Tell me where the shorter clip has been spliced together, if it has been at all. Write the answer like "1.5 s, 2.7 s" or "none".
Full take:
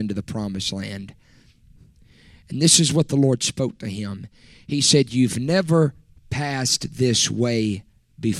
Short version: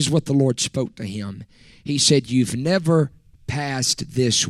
none